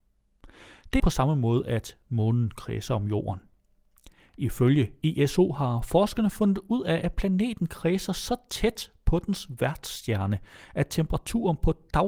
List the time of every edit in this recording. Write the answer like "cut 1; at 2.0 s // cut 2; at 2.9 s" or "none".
cut 1; at 1.0 s